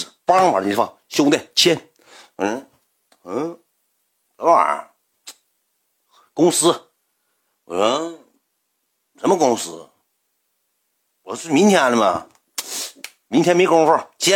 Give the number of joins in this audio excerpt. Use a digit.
0